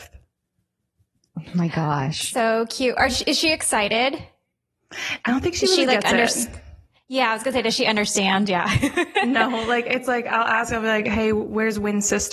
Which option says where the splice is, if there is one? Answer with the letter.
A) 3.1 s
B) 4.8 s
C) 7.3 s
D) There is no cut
D